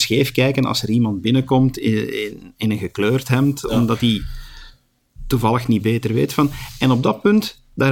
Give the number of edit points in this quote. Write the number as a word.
zero